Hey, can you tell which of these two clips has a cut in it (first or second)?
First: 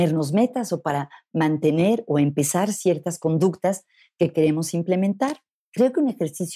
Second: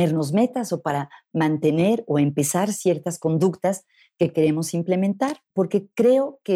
second